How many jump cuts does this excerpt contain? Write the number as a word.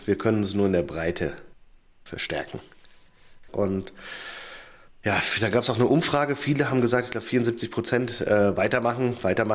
one